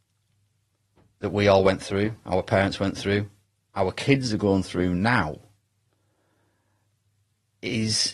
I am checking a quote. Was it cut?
no; 0 cuts

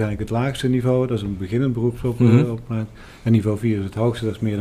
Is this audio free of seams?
yes; 0 cuts

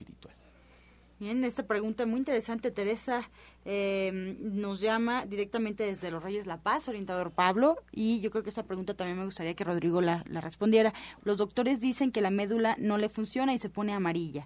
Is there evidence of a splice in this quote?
yes; 1 cut; at 11.2 s

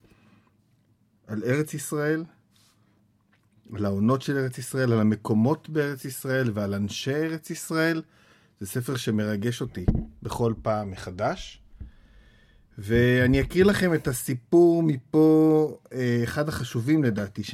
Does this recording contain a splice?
no; 0 cuts

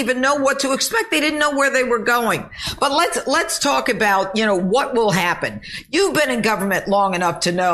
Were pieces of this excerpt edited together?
no; 0 cuts

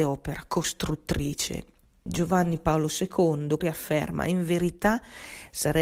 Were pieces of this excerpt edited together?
yes; 2 cuts; at 2.1 s, 3.6 s

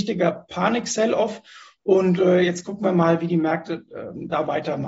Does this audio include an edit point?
no; 0 cuts

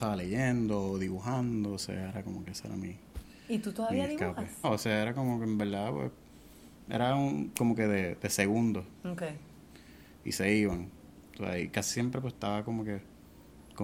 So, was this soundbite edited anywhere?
yes; 1 cut; at 4.6 s

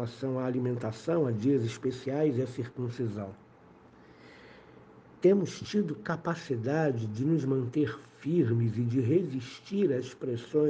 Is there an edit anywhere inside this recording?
no; 0 cuts

